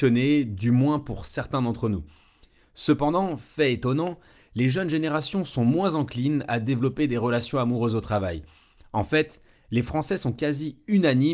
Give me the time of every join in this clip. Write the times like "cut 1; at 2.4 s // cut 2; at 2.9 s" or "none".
cut 1; at 8.8 s